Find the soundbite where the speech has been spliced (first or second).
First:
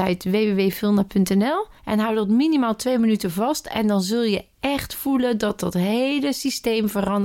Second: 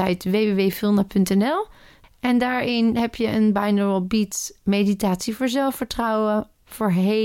first